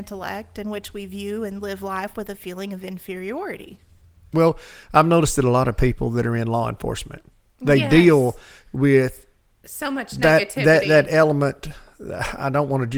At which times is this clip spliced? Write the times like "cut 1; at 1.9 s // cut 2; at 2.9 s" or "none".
cut 1; at 4.3 s